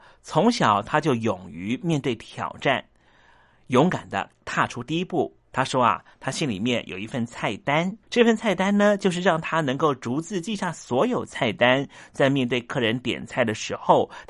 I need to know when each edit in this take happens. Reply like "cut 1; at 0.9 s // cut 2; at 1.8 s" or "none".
cut 1; at 5.5 s // cut 2; at 8.0 s